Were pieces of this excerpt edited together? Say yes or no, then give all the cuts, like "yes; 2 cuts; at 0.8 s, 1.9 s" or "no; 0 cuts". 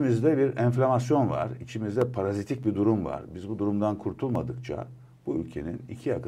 no; 0 cuts